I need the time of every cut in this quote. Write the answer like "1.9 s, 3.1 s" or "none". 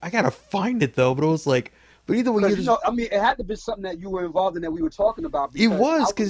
none